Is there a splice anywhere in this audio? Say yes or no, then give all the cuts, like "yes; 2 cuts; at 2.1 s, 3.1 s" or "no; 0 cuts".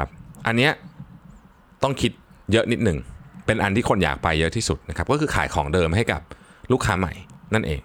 no; 0 cuts